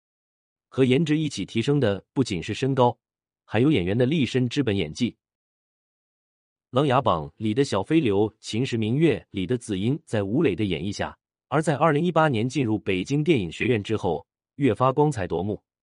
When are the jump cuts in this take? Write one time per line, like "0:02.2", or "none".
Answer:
0:11.5
0:14.5